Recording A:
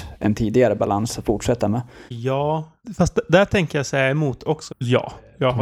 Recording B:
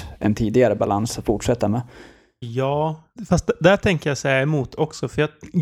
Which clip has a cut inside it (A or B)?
A